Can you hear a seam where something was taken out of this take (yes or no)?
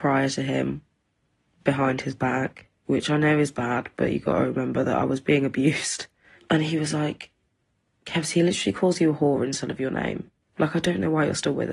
no